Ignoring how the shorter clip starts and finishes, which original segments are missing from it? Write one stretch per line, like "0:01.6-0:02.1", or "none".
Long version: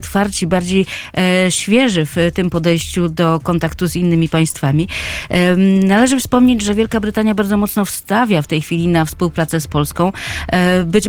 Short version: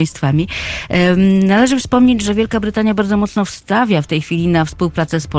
none